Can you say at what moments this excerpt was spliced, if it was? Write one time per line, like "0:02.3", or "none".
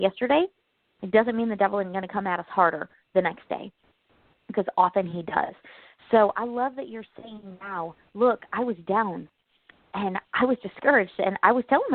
none